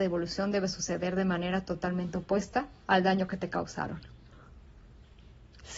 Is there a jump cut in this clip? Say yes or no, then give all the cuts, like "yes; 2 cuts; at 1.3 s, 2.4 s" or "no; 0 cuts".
no; 0 cuts